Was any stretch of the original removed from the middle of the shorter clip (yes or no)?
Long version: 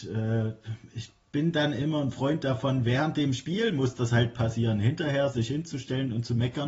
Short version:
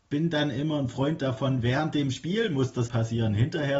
yes